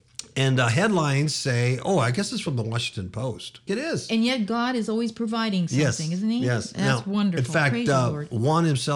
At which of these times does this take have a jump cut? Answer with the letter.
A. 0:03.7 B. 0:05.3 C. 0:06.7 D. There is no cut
A